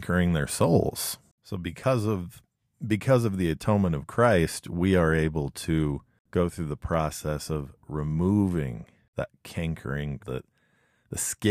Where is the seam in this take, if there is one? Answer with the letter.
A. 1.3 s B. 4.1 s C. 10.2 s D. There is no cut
C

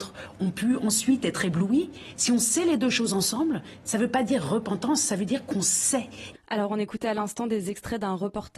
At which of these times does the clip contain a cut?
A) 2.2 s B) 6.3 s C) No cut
B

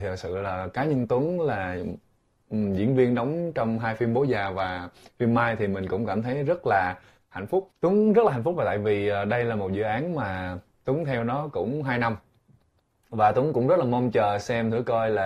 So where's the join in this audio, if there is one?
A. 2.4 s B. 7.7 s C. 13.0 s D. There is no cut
B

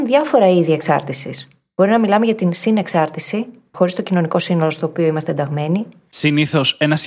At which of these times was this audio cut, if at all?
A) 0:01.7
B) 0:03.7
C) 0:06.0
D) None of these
B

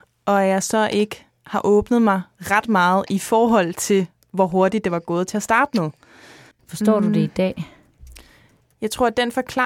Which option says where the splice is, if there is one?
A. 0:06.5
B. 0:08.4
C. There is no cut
A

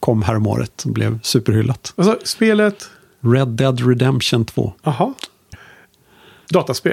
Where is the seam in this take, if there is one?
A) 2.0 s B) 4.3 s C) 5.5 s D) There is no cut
C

